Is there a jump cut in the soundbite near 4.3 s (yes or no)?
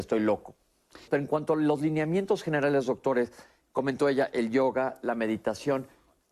no